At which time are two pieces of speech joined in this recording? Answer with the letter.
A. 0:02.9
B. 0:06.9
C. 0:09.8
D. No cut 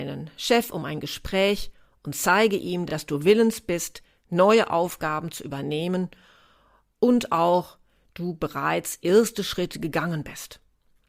D